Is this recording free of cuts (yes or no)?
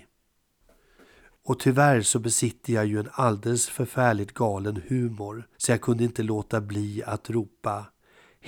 no